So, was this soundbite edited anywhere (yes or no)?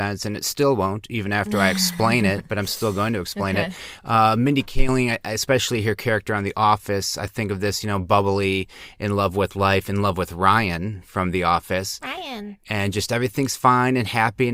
no